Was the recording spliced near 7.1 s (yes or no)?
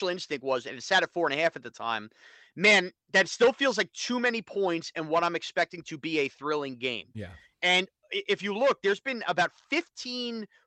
no